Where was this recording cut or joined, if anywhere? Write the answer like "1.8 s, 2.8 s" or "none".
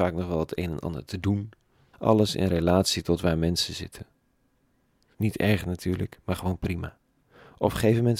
1.9 s, 5.1 s